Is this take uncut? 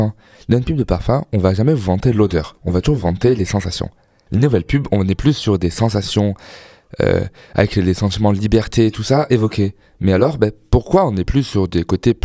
no; 1 cut; at 4.3 s

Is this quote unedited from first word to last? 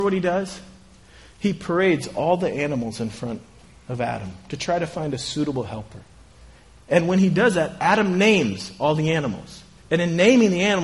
yes; 0 cuts

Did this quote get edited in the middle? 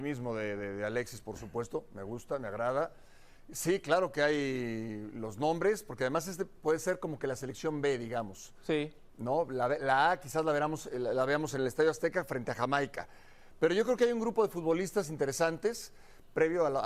no; 0 cuts

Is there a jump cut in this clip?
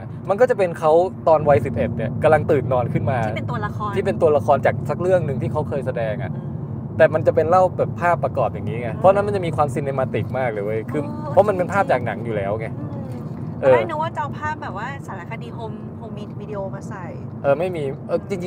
yes; 1 cut; at 16.1 s

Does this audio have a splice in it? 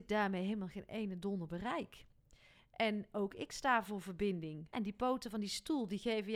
yes; 1 cut; at 4.7 s

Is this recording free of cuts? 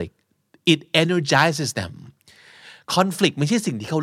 yes; 0 cuts

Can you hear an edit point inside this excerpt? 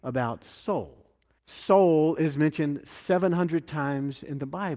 yes; 1 cut; at 1.4 s

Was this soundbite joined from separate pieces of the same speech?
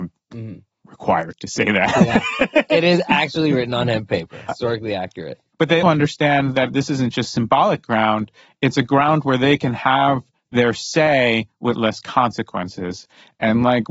yes; 2 cuts; at 4.5 s, 5.8 s

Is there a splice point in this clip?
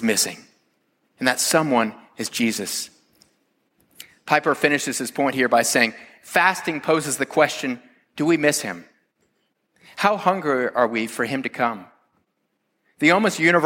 no; 0 cuts

